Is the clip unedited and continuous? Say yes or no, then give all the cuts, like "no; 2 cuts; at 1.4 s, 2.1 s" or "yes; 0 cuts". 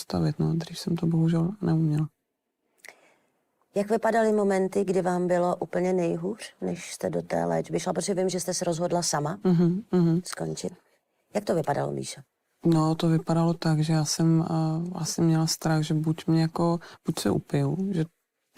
yes; 0 cuts